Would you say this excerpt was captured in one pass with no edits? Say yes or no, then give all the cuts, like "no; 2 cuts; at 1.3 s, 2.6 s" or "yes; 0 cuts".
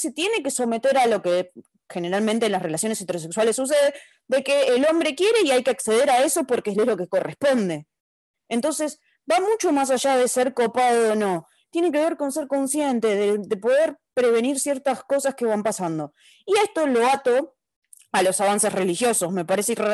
yes; 0 cuts